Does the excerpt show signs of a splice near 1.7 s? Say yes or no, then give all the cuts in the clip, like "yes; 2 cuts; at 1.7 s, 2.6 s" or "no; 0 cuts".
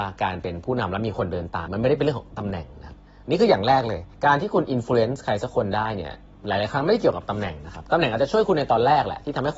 yes; 2 cuts; at 1.7 s, 4.1 s